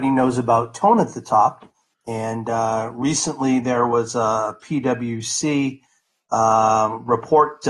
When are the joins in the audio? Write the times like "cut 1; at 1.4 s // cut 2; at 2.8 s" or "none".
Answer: cut 1; at 1.9 s